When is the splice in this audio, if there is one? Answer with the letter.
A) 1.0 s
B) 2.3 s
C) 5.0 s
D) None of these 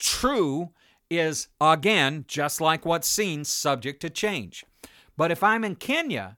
C